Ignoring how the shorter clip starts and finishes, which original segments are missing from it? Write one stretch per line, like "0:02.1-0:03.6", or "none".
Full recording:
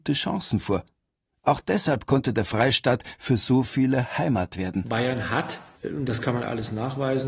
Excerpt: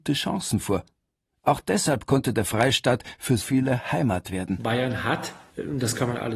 0:03.4-0:03.7